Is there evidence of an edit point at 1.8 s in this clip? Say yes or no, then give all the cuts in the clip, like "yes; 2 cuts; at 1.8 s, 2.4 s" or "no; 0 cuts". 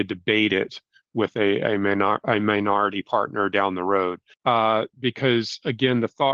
no; 1 cut; at 4.3 s